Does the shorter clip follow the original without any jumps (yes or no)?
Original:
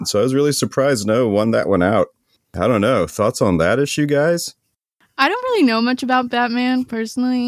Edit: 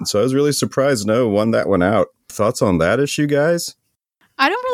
no